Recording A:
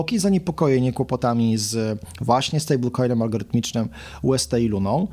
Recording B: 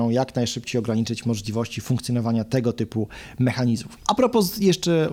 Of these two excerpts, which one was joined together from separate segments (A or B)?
B